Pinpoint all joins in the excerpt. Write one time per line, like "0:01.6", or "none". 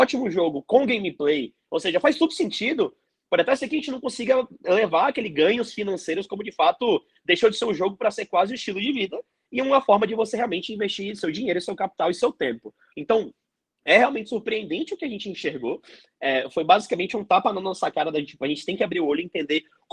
0:12.9